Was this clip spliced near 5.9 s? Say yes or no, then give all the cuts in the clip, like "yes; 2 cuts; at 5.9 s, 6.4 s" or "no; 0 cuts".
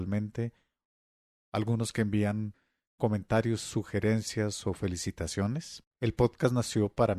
yes; 1 cut; at 5.9 s